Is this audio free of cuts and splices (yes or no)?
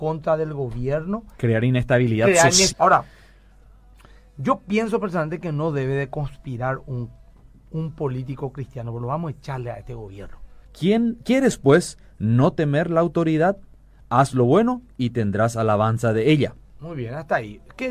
no